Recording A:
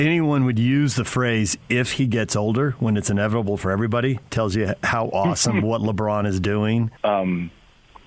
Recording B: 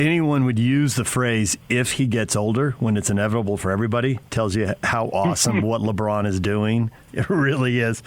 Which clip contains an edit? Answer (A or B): A